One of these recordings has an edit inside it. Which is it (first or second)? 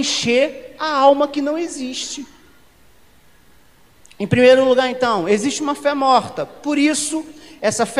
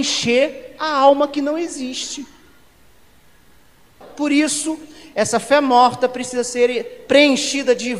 second